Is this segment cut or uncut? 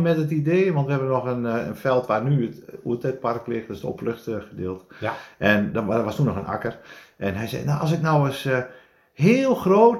uncut